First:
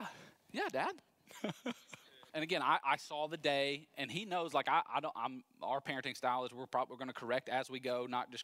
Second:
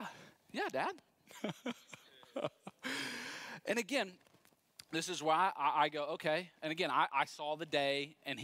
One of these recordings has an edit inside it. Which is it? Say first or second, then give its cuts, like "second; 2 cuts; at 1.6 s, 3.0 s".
first; 1 cut; at 2.3 s